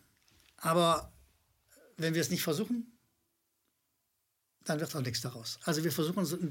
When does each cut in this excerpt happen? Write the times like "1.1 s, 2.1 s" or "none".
none